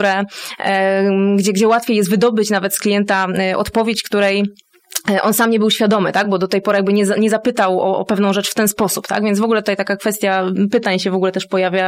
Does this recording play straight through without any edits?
yes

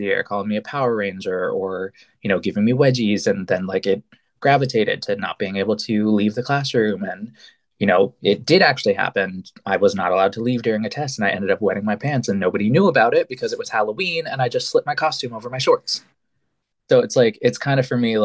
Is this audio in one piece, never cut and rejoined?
no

